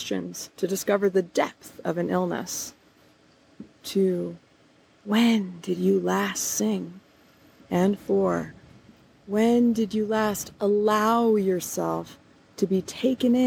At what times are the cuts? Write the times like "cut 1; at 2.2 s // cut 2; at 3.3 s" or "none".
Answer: cut 1; at 3.8 s // cut 2; at 7.6 s